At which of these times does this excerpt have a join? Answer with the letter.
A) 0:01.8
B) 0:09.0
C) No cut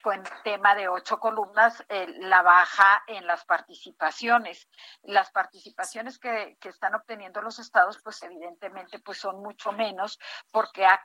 C